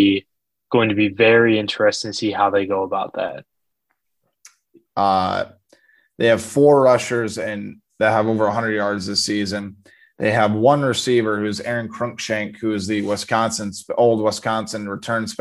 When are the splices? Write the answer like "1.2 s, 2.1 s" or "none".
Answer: 4.8 s